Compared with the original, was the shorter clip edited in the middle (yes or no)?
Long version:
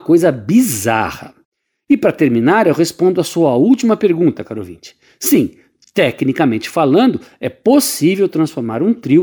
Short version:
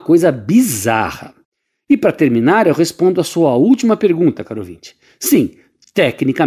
no